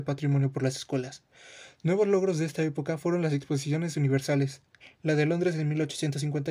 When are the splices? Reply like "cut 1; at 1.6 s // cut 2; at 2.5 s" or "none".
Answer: none